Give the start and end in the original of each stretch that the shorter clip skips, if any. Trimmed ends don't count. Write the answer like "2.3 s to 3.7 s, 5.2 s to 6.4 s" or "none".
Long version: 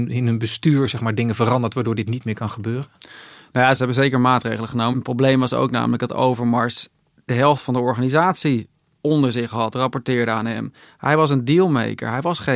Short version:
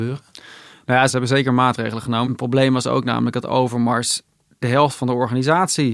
none